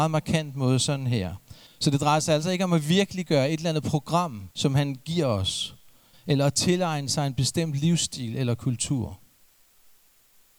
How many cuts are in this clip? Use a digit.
3